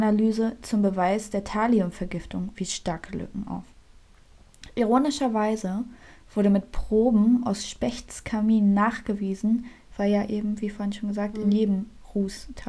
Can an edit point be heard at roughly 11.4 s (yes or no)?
no